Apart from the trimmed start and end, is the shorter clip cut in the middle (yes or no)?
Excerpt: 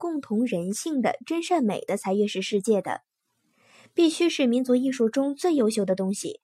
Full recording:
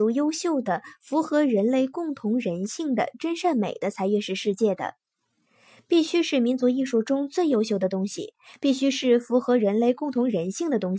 no